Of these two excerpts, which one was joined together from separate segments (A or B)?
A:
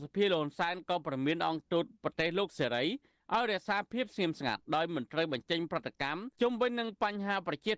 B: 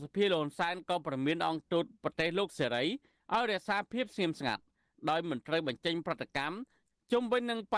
A